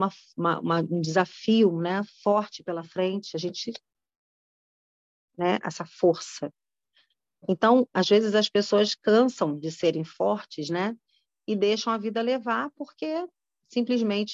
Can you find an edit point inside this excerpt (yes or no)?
no